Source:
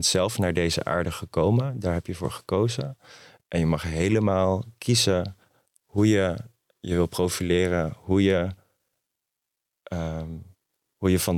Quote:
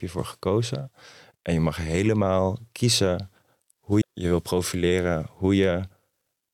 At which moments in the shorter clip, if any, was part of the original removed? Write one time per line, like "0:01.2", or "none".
0:04.0